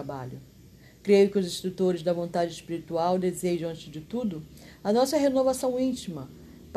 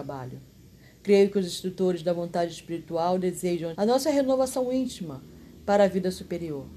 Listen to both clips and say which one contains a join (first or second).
second